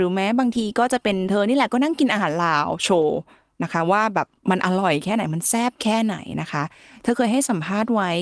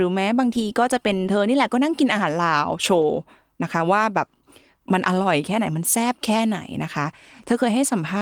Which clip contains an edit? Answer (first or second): first